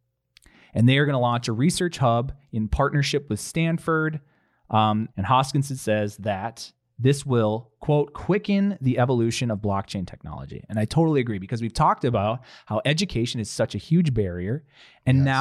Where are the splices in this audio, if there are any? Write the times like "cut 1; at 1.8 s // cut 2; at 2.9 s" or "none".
cut 1; at 5.1 s